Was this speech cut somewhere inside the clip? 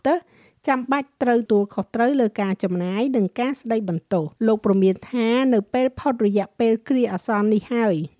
yes; 2 cuts; at 1.5 s, 4.4 s

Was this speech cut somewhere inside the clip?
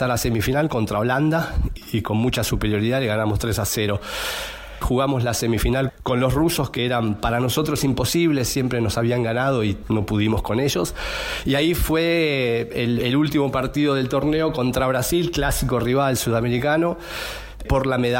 yes; 1 cut; at 4.8 s

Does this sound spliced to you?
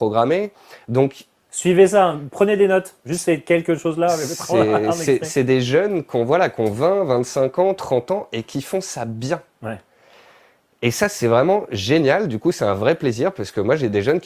no; 0 cuts

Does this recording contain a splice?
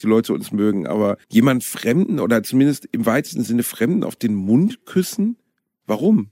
yes; 1 cut; at 1.2 s

